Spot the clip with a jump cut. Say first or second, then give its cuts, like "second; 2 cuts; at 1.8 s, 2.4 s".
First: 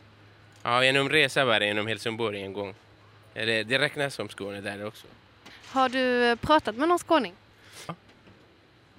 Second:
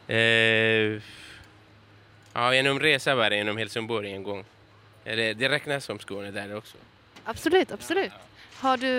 first; 2 cuts; at 5.5 s, 7.9 s